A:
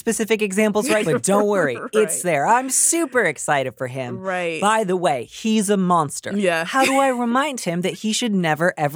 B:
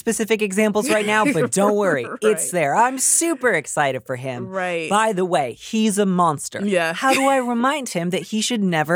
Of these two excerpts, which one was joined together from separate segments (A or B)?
A